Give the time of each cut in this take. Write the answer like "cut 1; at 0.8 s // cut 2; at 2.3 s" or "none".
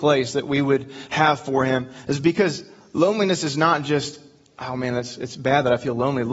none